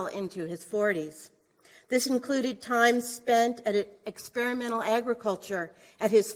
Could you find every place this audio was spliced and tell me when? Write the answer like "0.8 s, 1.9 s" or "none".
none